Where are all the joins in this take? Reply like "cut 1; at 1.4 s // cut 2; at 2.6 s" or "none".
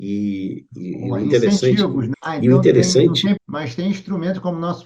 cut 1; at 2.1 s // cut 2; at 3.4 s